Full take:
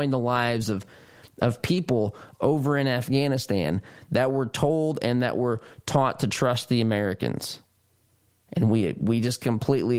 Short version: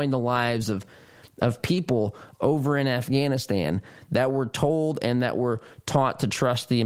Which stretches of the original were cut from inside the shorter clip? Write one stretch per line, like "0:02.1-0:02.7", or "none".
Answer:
none

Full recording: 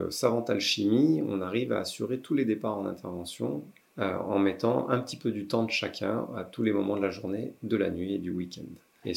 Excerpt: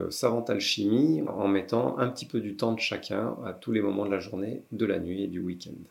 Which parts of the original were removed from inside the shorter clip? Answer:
0:01.3-0:04.2

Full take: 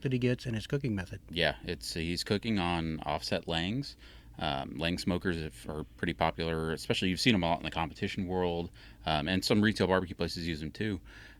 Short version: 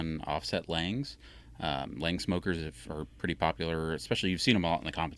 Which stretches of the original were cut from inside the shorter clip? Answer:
none

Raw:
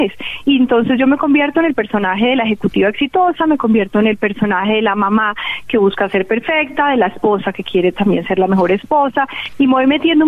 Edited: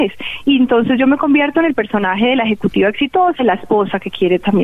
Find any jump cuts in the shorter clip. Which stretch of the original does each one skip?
0:03.4-0:06.9

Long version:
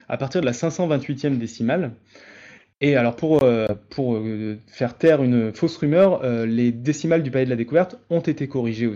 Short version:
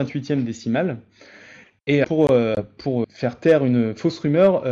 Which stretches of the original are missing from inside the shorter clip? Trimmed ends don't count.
0:03.0-0:03.2
0:04.2-0:04.6

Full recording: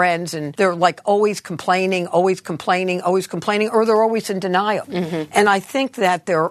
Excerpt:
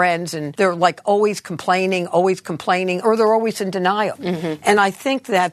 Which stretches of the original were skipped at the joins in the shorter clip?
0:03.0-0:03.7

